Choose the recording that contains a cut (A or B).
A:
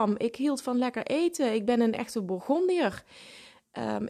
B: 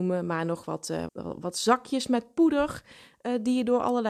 B